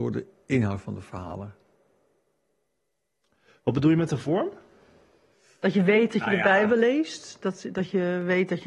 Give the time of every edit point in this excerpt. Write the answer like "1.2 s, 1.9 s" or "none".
none